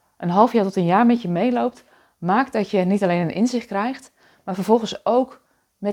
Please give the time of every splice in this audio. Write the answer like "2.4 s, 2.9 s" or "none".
none